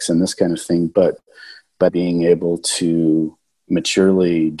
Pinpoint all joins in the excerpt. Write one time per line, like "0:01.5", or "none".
0:01.9